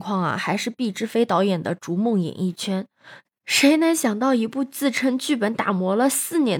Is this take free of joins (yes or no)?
no